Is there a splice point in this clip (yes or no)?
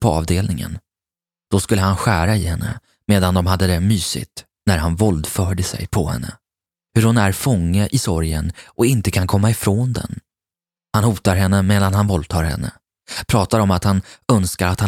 yes